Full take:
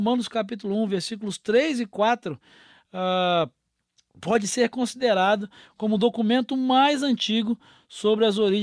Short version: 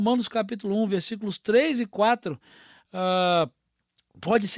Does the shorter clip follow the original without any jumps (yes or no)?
yes